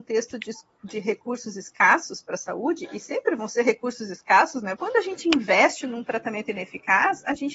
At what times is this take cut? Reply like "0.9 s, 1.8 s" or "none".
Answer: 4.8 s